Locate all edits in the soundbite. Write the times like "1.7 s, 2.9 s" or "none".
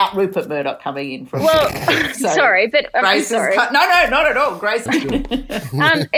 4.9 s

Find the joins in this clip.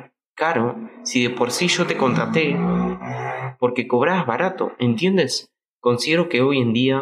5.7 s

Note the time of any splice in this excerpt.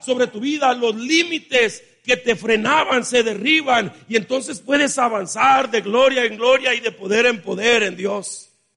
none

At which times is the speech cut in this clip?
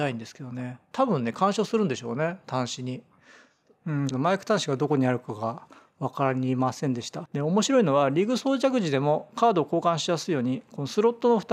4.1 s, 7.3 s

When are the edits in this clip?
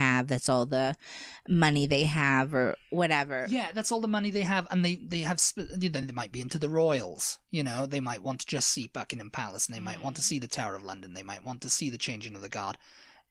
none

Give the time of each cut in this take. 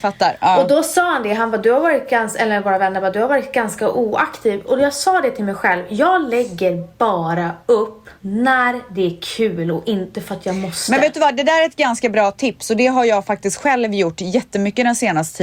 8.2 s

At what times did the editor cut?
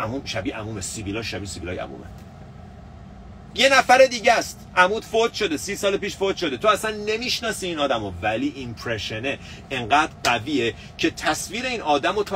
none

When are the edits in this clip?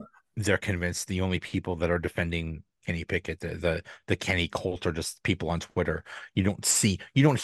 none

